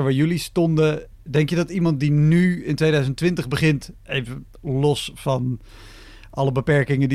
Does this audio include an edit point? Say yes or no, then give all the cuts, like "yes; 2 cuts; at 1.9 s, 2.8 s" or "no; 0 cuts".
no; 0 cuts